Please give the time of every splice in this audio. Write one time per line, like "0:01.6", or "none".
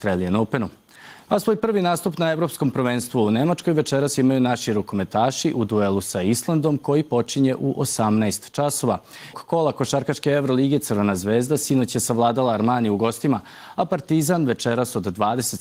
0:01.3
0:09.3

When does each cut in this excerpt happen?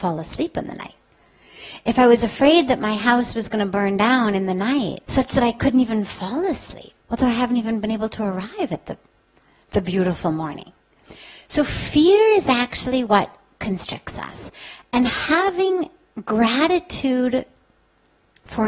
0:05.0
0:07.0

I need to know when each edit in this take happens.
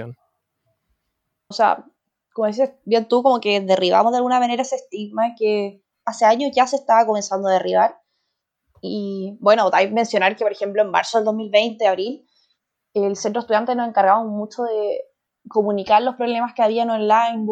0:01.5

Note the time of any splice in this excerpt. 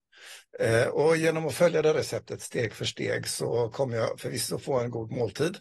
none

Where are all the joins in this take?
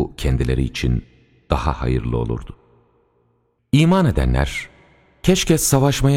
0:03.6

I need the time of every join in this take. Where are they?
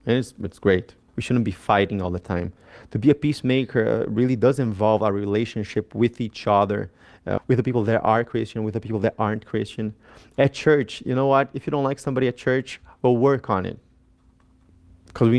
0:01.1
0:07.4

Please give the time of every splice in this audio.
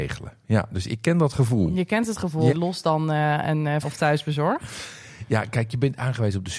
0:02.5
0:03.8

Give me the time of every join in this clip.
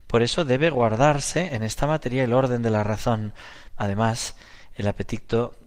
0:03.7

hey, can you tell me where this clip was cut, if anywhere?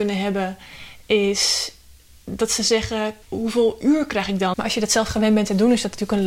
0:03.2
0:04.5

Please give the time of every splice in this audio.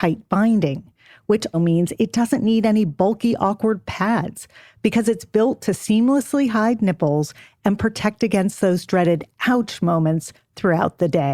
0:01.5

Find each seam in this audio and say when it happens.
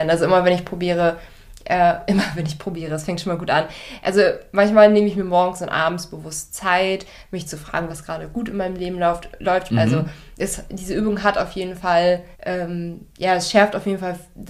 0:07.9
0:09.7
0:12.3

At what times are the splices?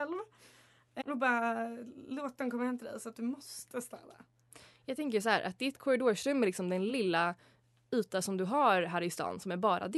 0:01.0
0:06.9

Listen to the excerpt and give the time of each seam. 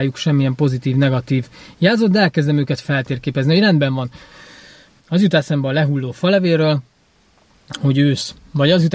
0:05.0

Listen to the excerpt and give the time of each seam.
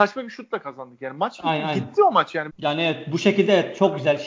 0:02.5

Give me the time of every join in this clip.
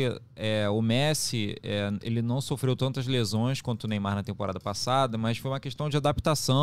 none

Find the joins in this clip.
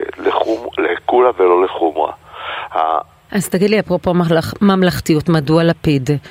0:03.3

